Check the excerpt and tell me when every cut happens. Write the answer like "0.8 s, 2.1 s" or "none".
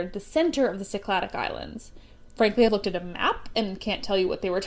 none